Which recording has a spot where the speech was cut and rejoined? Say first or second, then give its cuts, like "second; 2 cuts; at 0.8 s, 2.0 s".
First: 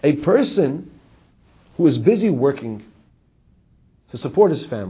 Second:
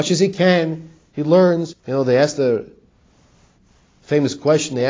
second; 1 cut; at 1.7 s